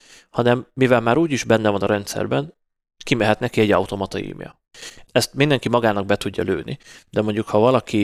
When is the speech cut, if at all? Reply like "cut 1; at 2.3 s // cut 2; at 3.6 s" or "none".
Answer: cut 1; at 5.0 s